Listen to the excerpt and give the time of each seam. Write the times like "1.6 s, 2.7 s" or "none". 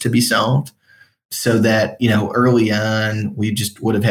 none